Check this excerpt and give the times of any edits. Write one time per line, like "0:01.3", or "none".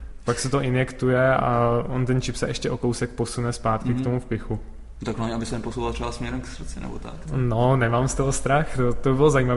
0:07.3